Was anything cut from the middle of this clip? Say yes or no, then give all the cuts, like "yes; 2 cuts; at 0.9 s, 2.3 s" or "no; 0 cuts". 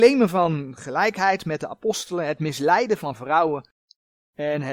no; 0 cuts